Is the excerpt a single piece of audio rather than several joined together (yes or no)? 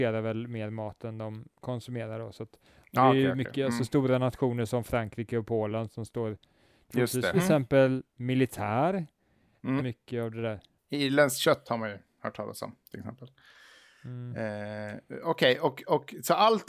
no